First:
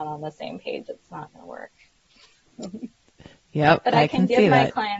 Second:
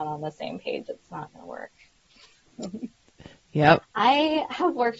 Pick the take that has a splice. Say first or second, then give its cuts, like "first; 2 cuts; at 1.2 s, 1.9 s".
second; 1 cut; at 3.8 s